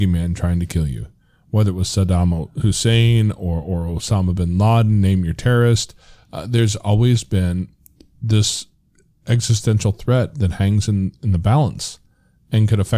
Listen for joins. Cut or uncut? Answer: uncut